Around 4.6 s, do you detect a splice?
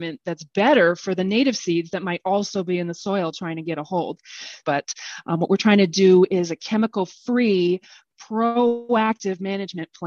yes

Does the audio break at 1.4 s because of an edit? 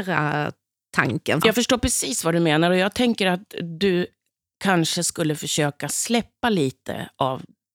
yes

